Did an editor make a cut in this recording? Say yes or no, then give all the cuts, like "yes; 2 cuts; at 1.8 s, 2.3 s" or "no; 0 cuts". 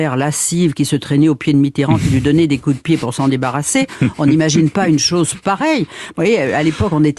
no; 0 cuts